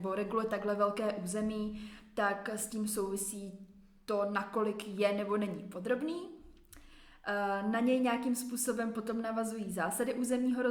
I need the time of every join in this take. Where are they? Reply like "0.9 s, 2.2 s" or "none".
none